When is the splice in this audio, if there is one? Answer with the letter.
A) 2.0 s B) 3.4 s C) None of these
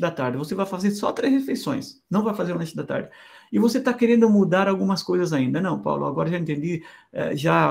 C